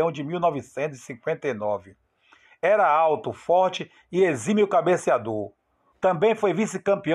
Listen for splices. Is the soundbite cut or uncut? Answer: cut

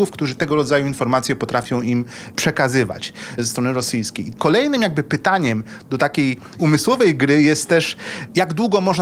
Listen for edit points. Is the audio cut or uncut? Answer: uncut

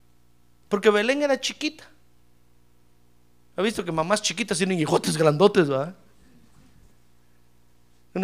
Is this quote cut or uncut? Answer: uncut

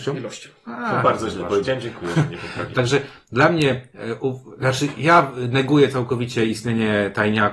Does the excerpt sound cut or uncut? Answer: cut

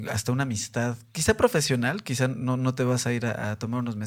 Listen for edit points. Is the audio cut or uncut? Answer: uncut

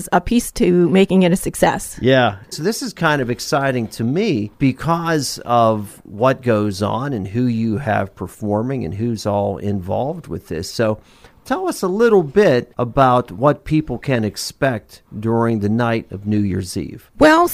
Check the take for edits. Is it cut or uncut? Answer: cut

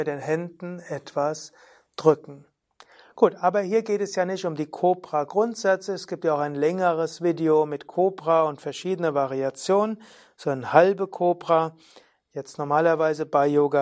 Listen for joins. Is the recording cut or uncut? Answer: uncut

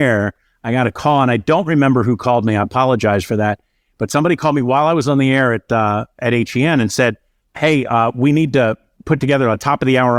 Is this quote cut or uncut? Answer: uncut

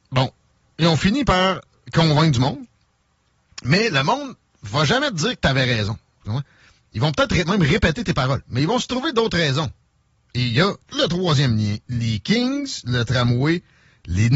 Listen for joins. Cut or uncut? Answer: cut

